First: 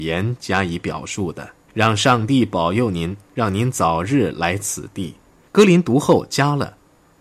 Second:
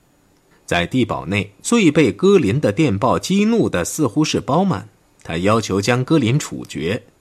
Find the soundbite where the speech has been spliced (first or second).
first